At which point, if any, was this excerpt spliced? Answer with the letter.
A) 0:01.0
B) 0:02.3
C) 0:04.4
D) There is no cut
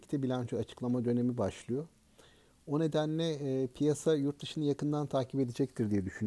D